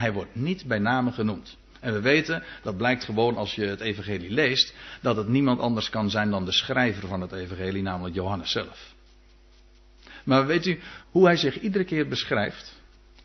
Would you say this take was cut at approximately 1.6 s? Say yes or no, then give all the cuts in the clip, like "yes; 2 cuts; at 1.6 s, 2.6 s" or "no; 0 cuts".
no; 1 cut; at 11.0 s